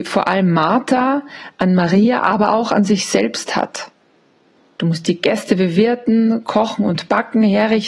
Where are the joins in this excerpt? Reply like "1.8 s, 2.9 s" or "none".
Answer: none